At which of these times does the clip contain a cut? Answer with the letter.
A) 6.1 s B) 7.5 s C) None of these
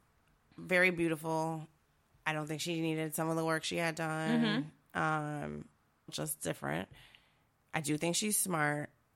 A